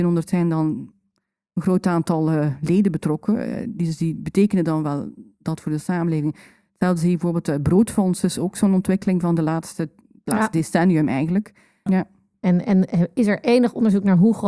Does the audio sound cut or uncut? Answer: cut